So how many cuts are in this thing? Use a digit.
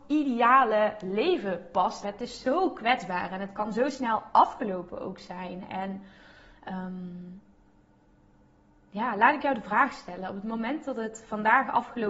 1